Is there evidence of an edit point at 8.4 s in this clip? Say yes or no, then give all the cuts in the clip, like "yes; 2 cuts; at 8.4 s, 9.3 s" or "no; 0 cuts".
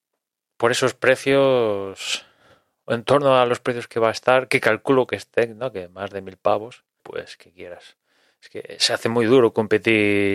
no; 1 cut; at 7.0 s